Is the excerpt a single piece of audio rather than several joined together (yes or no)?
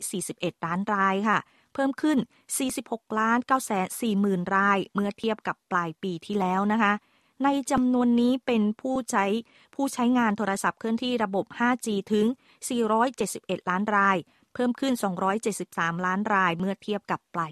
yes